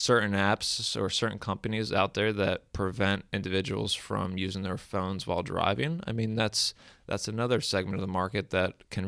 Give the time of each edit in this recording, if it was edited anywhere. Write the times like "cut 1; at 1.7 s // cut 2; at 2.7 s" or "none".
none